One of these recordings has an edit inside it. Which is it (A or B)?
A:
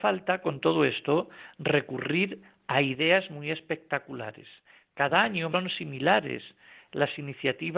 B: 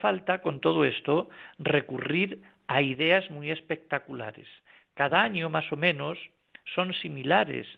A